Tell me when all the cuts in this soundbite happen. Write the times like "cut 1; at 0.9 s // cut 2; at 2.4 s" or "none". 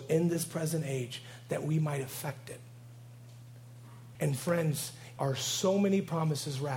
cut 1; at 4.1 s // cut 2; at 5.2 s